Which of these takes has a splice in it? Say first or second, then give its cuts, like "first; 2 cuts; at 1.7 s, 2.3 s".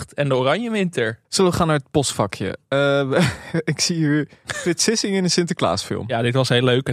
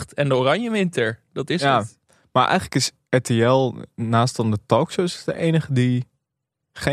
first; 1 cut; at 1.2 s